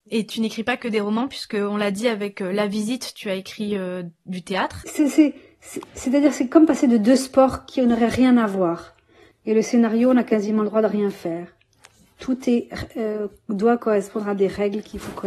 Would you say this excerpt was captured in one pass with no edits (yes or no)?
no